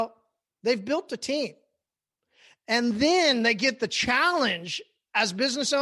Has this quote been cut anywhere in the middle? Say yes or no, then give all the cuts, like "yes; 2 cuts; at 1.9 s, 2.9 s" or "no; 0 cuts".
no; 0 cuts